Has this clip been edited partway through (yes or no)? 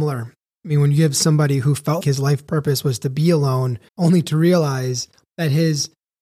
yes